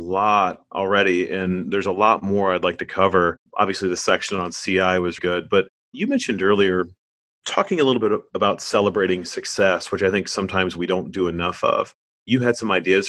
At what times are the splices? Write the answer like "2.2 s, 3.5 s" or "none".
3.5 s, 5.2 s